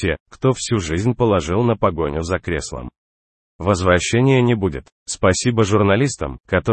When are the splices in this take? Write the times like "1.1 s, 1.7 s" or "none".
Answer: 4.9 s